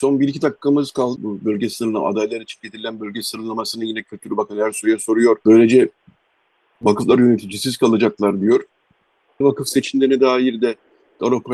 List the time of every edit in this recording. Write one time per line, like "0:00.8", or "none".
0:01.2
0:05.4
0:09.4